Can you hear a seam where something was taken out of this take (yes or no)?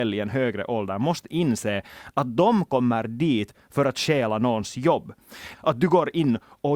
yes